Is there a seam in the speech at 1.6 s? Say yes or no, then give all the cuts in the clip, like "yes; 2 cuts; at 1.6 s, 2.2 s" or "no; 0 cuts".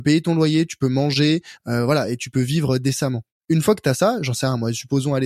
no; 0 cuts